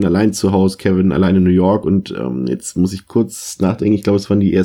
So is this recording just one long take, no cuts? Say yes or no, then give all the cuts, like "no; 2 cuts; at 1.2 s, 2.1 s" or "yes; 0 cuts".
yes; 0 cuts